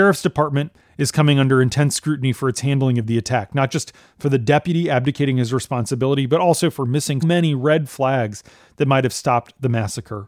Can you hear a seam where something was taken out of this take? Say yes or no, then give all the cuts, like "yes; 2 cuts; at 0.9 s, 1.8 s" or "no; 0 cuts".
yes; 1 cut; at 7.2 s